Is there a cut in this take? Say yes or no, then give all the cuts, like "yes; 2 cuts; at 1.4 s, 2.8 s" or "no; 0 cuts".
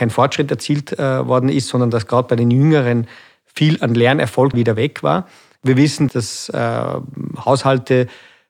yes; 2 cuts; at 4.5 s, 6.1 s